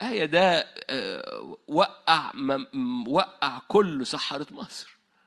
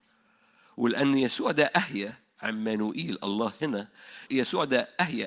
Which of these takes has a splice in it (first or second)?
second